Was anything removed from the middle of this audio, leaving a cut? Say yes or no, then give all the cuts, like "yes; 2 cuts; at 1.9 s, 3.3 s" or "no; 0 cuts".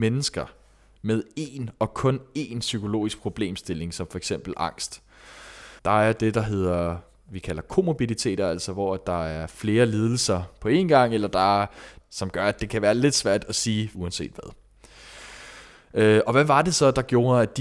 yes; 3 cuts; at 5.8 s, 12.0 s, 13.9 s